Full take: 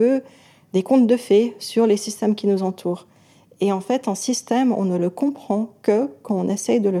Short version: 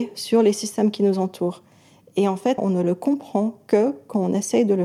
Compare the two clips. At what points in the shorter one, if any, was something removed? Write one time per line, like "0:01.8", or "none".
0:02.6